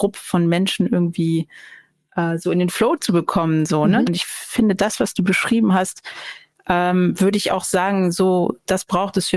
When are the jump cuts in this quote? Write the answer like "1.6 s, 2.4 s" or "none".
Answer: 4.1 s, 8.1 s